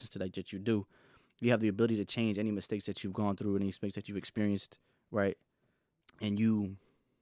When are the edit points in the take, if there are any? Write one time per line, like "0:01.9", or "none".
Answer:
0:06.0